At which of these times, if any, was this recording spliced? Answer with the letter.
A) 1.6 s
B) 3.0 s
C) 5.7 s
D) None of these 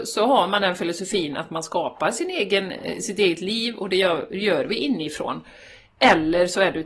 D